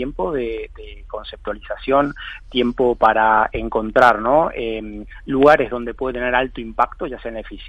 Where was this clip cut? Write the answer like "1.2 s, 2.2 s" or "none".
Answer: none